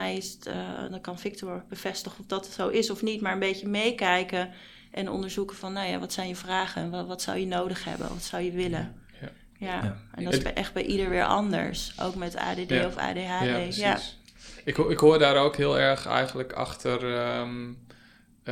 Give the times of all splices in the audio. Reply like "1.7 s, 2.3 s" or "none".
none